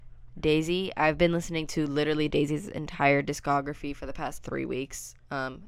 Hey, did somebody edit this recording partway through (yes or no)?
yes